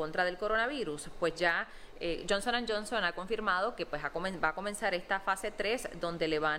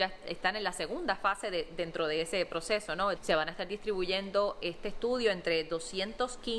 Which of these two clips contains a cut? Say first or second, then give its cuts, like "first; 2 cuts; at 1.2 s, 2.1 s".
second; 1 cut; at 3.2 s